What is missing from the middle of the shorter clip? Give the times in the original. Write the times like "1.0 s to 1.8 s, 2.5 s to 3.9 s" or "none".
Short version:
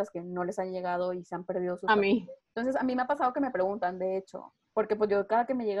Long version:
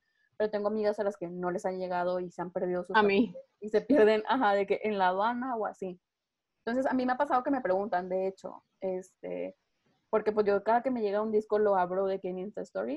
3.5 s to 6.5 s, 8.7 s to 10.0 s